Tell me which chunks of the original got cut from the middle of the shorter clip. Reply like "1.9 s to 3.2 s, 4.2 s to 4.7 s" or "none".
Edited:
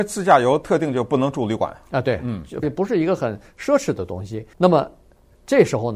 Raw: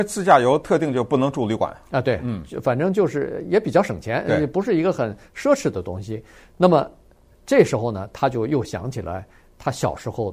2.6 s to 4.4 s, 6.3 s to 6.5 s

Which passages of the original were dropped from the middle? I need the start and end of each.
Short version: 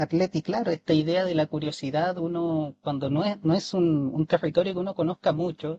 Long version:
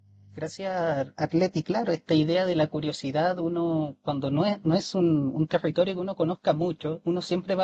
none

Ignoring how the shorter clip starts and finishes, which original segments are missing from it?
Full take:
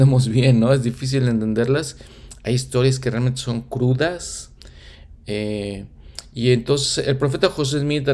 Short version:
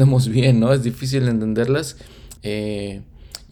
2.4 s to 5.2 s

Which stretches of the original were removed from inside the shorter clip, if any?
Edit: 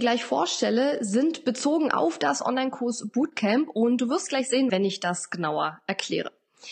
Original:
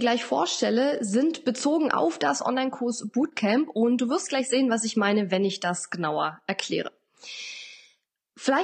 4.7 s to 5.3 s

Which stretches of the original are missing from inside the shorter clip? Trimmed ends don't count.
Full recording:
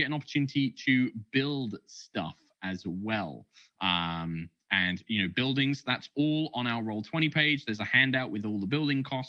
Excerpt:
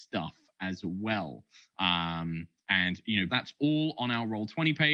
5.3 s to 5.8 s

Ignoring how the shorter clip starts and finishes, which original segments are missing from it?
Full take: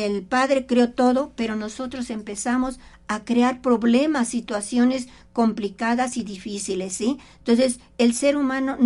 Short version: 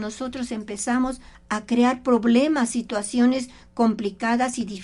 none

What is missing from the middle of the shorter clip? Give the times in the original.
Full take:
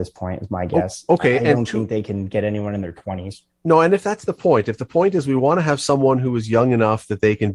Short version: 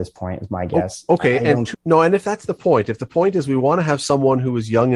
1.7 s to 3.5 s

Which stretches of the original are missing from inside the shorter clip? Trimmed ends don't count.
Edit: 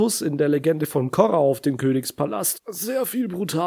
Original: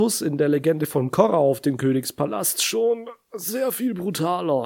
2.6 s to 3.2 s

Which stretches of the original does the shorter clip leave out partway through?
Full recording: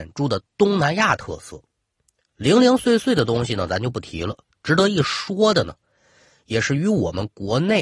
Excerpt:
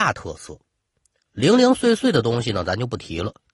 none

